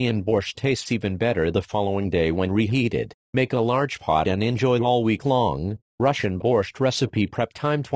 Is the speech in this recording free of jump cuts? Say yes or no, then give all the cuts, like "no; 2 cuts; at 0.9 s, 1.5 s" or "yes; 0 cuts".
no; 1 cut; at 5.9 s